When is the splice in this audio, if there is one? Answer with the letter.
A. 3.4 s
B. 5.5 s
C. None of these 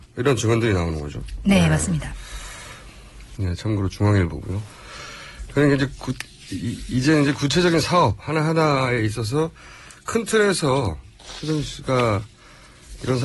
A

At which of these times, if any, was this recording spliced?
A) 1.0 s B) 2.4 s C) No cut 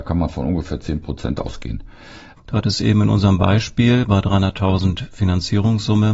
B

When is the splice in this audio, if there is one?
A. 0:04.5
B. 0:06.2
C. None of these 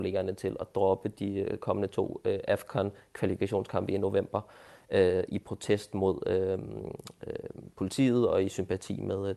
C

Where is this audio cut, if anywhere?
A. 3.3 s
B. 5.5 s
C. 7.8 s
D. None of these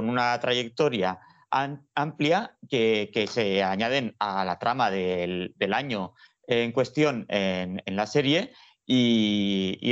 D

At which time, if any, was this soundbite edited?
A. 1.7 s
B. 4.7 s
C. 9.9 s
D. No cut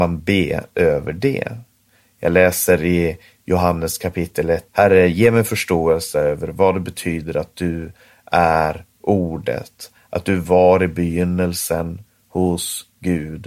B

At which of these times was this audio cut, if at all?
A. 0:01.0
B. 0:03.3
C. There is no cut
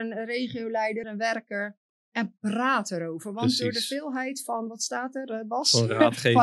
A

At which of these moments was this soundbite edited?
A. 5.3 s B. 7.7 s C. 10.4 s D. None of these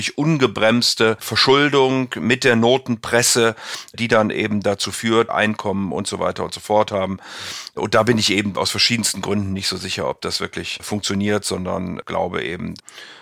A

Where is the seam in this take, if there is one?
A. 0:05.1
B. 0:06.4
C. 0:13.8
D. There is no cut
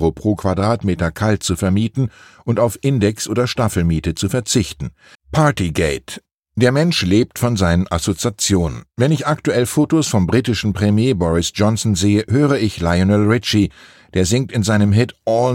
A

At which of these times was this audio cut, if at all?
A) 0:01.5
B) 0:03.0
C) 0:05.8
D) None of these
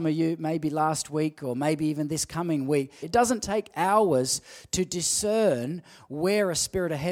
B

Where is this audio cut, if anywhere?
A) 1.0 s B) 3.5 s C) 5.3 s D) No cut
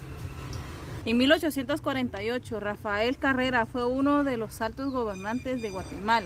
A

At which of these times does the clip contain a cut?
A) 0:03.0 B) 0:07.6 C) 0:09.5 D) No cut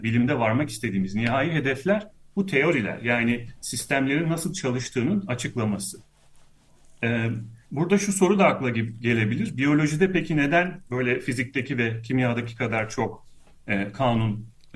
B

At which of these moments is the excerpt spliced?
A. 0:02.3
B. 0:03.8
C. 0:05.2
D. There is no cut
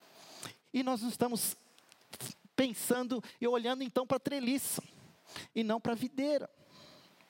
D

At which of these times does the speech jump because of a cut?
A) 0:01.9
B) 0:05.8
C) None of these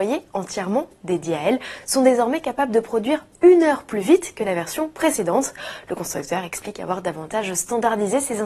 C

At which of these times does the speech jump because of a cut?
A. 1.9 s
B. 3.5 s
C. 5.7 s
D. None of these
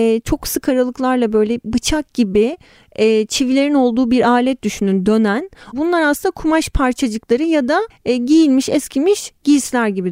C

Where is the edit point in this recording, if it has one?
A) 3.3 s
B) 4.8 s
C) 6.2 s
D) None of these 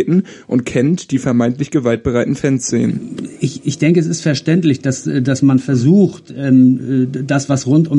D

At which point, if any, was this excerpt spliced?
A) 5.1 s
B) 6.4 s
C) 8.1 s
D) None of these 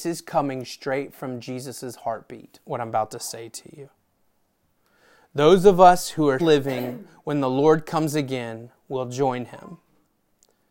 B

